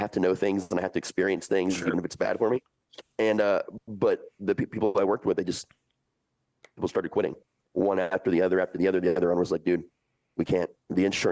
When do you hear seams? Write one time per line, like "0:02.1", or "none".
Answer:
none